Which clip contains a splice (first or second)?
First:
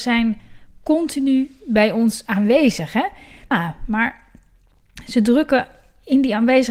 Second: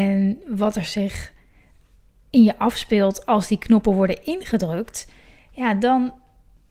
first